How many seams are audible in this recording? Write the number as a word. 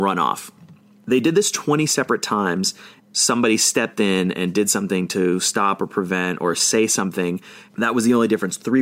two